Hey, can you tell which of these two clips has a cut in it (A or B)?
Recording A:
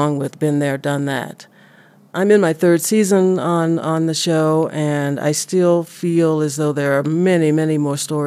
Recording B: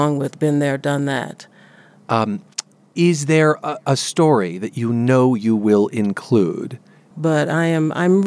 B